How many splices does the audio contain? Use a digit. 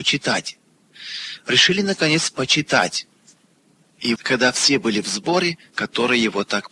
2